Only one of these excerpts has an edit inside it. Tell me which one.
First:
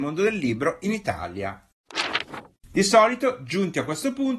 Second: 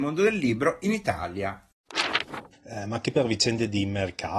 second; 1 cut; at 2.5 s

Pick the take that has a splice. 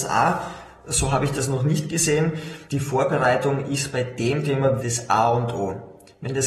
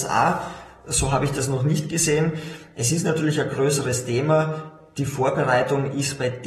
first; 2 cuts; at 2.7 s, 4.8 s

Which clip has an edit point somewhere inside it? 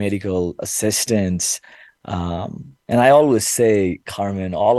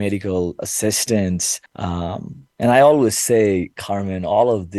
second; 1 cut; at 1.7 s

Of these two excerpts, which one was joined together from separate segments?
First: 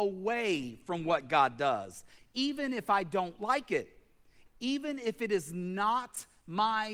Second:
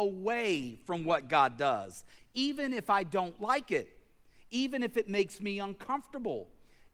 first; 1 cut; at 4.5 s

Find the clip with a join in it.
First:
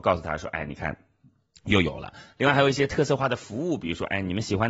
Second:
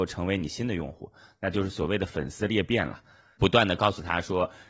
second; 1 cut; at 3.4 s

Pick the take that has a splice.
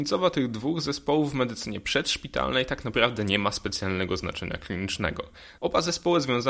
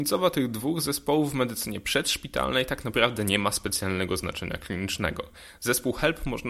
first; 1 cut; at 5.6 s

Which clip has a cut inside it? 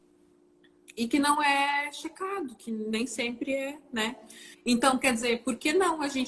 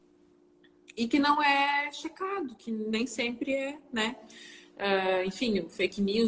first; 1 cut; at 4.5 s

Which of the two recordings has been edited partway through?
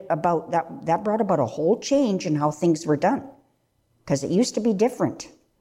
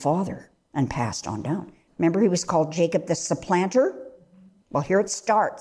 second; 1 cut; at 1.9 s

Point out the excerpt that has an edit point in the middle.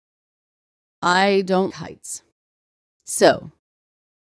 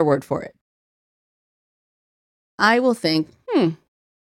first; 1 cut; at 1.7 s

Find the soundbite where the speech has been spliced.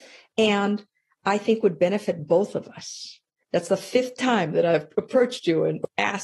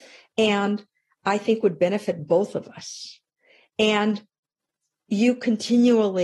first; 1 cut; at 3.4 s

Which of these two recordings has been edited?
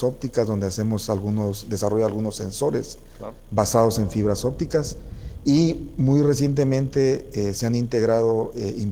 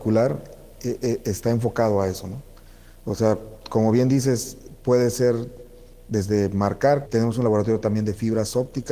second; 1 cut; at 7.1 s

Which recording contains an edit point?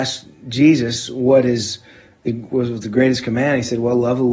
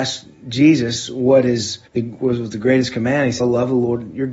second; 2 cuts; at 1.9 s, 3.4 s

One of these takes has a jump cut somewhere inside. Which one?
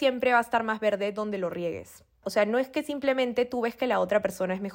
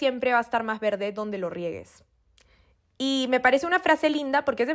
first; 1 cut; at 2.2 s

